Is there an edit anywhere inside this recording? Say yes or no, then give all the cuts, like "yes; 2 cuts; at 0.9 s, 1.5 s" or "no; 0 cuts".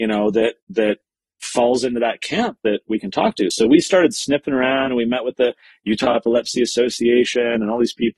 no; 0 cuts